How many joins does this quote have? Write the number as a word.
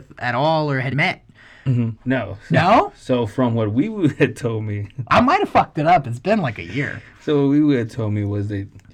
three